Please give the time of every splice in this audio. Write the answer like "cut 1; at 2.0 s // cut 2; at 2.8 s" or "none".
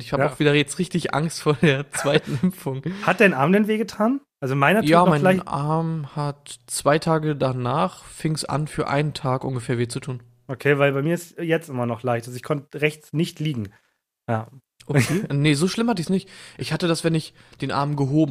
cut 1; at 4.3 s

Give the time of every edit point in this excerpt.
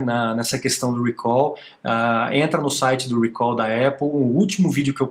none

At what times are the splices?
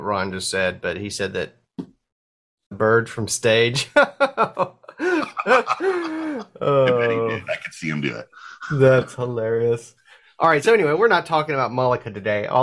none

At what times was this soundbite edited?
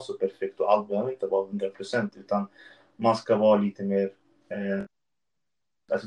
none

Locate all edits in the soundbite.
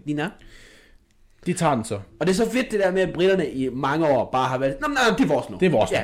none

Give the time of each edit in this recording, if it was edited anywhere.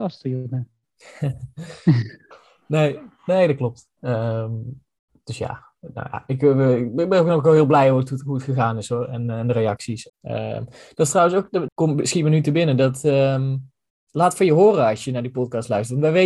cut 1; at 10.1 s // cut 2; at 11.7 s

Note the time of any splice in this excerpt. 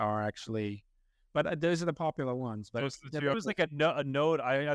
cut 1; at 3.3 s

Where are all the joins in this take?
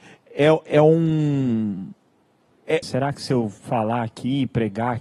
cut 1; at 2.8 s

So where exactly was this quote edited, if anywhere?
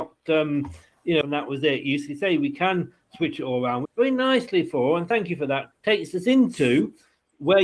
cut 1; at 1.2 s // cut 2; at 3.8 s // cut 3; at 5.7 s

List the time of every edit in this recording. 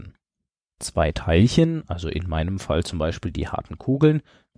none

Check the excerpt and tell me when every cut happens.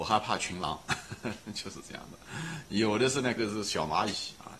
cut 1; at 3.4 s

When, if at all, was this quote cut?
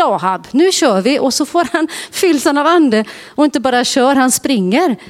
none

